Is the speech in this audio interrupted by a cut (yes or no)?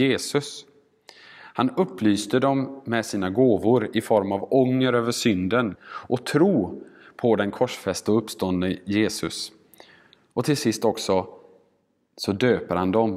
yes